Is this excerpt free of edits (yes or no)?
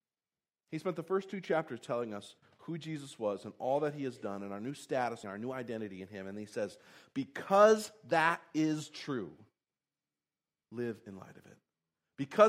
no